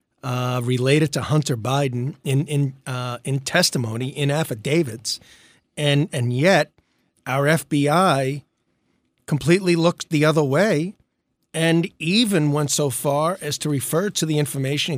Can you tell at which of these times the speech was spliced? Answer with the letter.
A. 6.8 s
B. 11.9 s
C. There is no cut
C